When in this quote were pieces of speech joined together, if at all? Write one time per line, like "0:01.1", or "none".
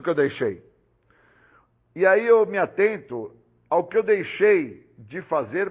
none

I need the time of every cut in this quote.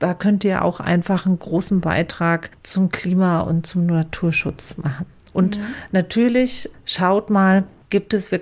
none

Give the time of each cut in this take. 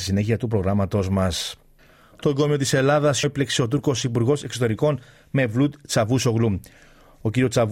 0:03.2

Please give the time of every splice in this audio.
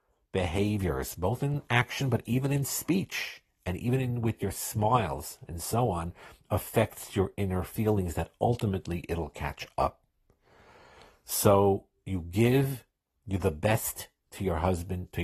none

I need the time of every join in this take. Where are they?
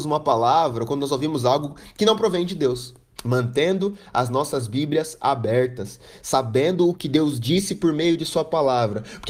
0:03.2

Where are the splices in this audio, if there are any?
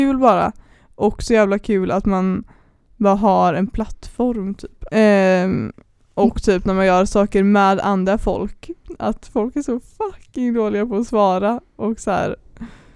0:04.9

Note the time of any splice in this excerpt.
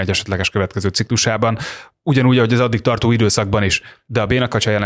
none

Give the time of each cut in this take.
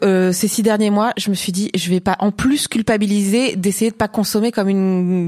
none

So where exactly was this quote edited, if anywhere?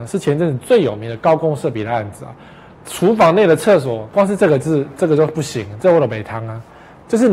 0:02.7

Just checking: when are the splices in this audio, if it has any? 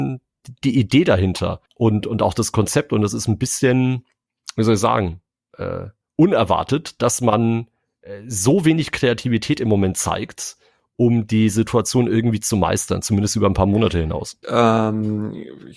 0:01.7
0:14.4

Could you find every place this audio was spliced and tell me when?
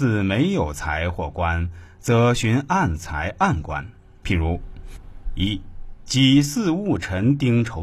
0:04.2

